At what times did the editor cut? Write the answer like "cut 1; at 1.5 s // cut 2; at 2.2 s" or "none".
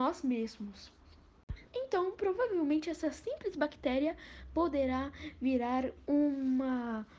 cut 1; at 1.6 s